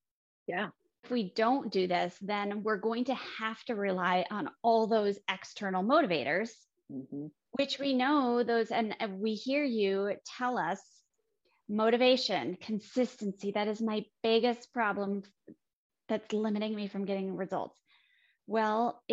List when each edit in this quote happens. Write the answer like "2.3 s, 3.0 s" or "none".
1.0 s